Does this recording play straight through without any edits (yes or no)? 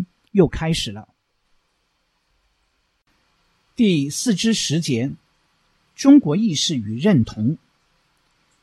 yes